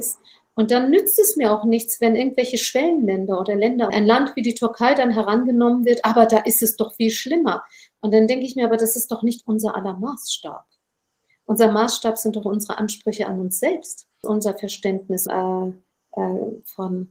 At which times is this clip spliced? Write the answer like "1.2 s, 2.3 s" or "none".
3.9 s, 14.2 s, 15.3 s